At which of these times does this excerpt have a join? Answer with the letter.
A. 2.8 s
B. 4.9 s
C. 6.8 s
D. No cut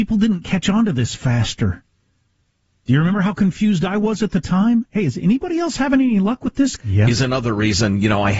C